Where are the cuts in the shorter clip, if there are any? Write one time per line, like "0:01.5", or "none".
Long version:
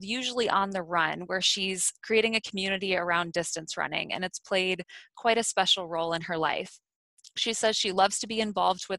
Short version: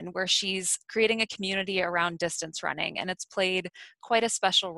none

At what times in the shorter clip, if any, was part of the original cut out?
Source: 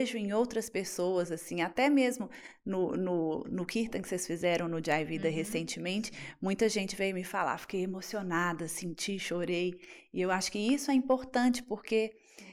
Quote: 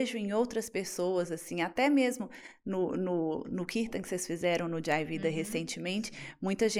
none

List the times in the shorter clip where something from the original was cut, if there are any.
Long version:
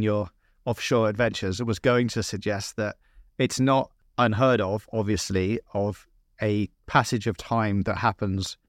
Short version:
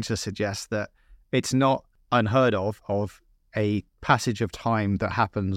0:02.8

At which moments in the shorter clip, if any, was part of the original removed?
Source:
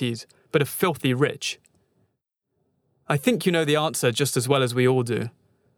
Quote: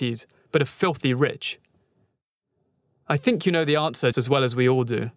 0:04.1

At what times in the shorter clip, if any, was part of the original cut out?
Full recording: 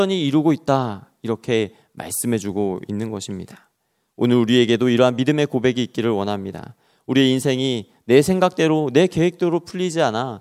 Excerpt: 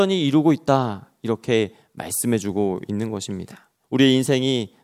0:03.8

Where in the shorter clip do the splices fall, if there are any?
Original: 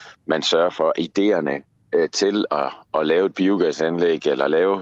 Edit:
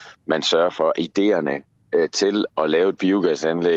0:02.5

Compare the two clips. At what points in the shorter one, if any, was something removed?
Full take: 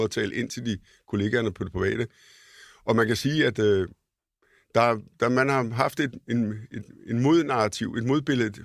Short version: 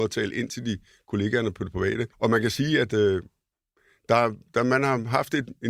0:02.1

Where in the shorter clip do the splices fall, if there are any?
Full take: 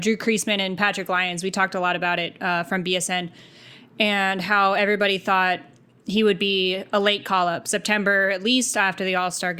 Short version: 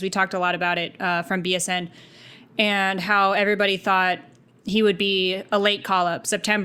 none

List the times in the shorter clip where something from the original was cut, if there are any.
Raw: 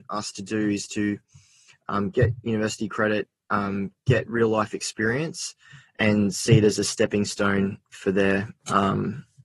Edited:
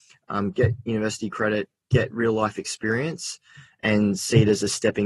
0:01.9

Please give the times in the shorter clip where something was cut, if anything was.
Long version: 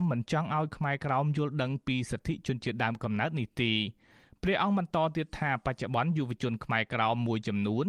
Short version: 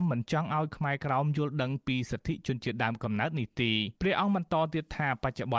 0:04.0

